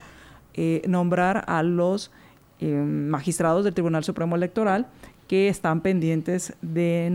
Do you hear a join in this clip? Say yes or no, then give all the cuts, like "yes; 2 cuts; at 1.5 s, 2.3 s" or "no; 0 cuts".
no; 0 cuts